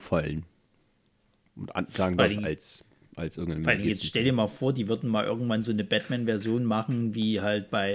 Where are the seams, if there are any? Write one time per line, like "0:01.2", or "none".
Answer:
0:02.2